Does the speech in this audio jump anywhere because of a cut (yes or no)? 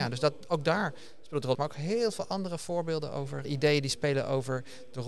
yes